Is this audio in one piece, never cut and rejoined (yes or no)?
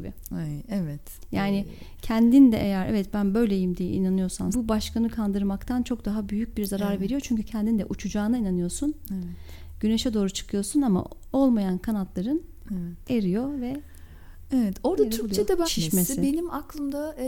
no